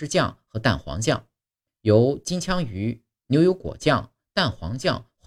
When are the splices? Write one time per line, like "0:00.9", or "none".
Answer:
0:01.7